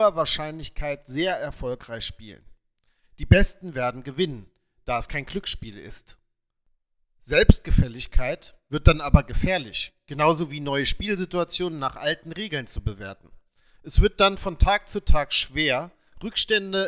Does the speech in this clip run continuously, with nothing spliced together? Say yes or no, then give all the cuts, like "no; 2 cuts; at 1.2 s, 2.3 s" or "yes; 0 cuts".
yes; 0 cuts